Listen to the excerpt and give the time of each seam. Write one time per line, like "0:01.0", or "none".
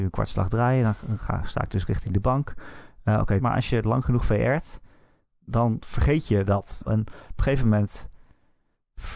0:03.4
0:06.9